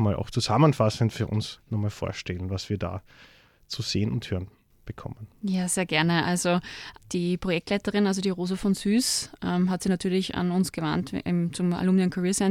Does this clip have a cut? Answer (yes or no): no